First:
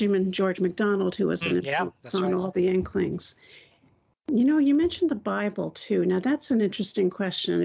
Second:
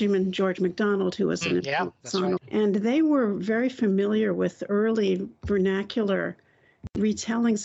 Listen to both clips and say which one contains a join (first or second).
second